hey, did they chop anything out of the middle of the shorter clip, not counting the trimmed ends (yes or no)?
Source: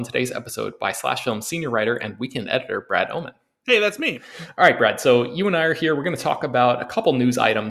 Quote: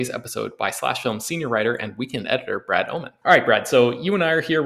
yes